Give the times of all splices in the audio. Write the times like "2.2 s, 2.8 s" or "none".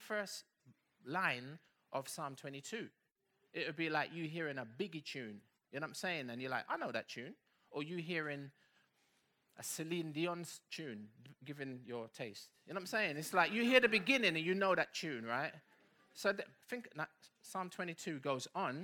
16.6 s

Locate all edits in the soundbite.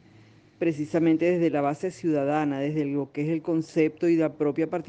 none

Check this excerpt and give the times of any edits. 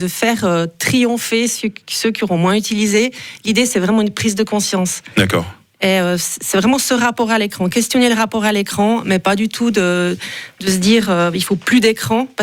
none

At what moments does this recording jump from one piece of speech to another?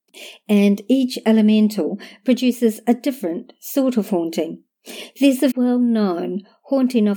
5.5 s

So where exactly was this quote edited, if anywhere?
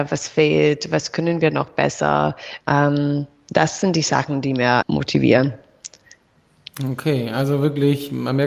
2.6 s, 4.8 s

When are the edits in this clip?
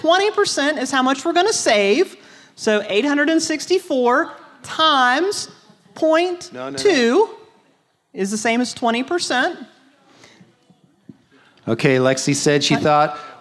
none

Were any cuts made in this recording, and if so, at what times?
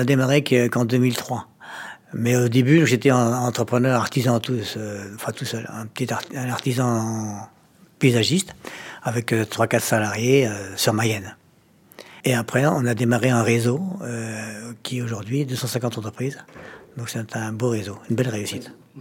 12.2 s

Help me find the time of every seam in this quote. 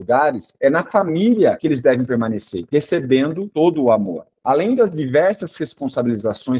none

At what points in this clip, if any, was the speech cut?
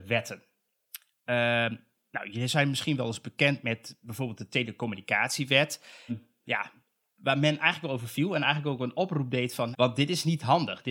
6.1 s, 9.7 s

